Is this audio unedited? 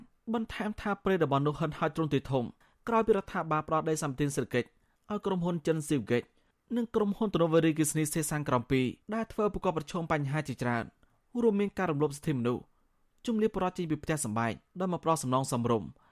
no; 1 cut; at 9.0 s

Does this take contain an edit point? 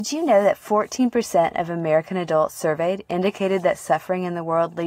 no; 0 cuts

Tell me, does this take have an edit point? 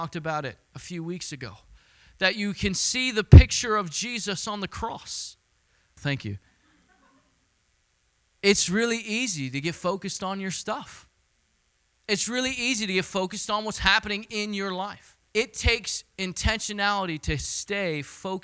yes; 2 cuts; at 6.0 s, 15.3 s

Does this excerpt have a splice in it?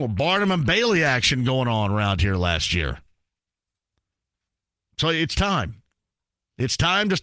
no; 0 cuts

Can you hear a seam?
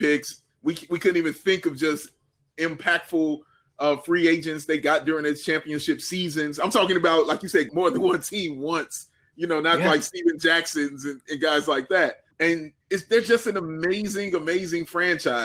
yes; 2 cuts; at 7.7 s, 12.3 s

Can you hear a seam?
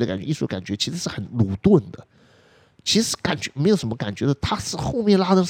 no; 0 cuts

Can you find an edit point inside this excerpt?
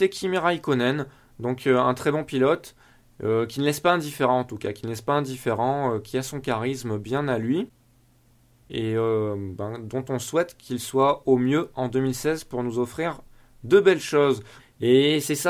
yes; 1 cut; at 14.6 s

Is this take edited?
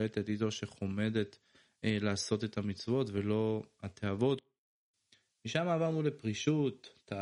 no; 0 cuts

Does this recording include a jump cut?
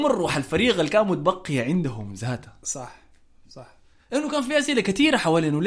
no; 0 cuts

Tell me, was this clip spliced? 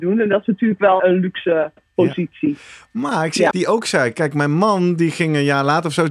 yes; 2 cuts; at 1.0 s, 3.5 s

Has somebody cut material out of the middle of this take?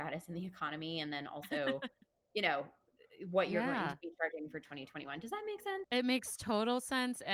no; 0 cuts

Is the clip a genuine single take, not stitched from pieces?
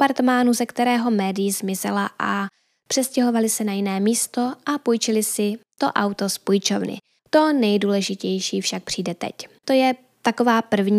no; 2 cuts; at 7.2 s, 9.6 s

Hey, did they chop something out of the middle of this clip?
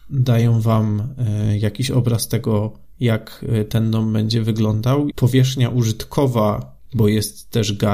yes; 2 cuts; at 5.1 s, 6.9 s

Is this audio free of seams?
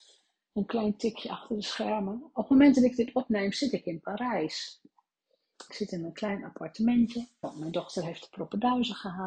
no; 2 cuts; at 5.7 s, 7.4 s

